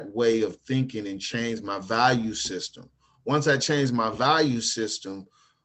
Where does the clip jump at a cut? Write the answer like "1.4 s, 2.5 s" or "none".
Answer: none